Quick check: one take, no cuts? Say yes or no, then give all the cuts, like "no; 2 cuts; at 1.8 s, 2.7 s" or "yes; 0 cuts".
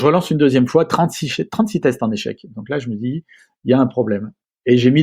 yes; 0 cuts